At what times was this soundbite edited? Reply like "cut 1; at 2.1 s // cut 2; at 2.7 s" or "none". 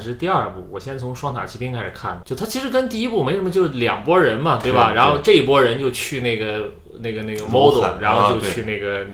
cut 1; at 2.2 s